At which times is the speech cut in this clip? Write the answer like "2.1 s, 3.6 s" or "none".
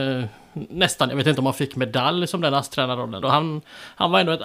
3.2 s